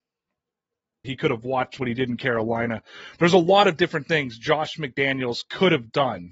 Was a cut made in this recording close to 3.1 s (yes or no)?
no